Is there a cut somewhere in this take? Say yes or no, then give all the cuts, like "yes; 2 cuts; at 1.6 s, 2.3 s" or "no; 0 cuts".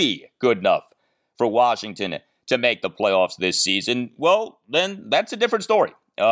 no; 0 cuts